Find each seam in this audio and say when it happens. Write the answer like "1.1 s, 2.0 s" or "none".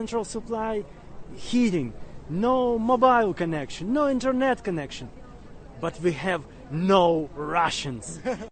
none